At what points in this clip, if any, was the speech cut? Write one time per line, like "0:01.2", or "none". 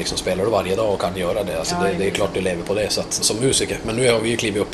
0:03.2